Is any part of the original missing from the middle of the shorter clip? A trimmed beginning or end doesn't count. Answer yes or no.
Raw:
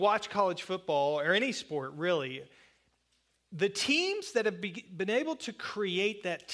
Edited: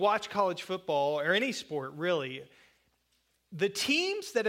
no